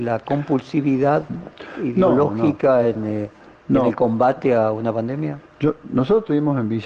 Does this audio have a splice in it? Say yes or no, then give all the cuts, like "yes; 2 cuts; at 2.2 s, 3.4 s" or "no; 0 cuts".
no; 0 cuts